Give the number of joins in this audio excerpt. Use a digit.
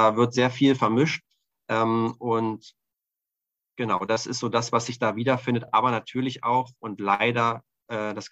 0